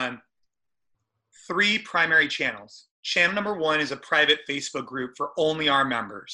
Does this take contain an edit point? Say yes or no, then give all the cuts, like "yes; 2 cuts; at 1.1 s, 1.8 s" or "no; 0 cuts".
yes; 1 cut; at 2.9 s